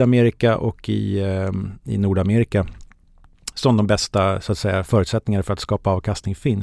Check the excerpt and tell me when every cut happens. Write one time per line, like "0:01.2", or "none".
none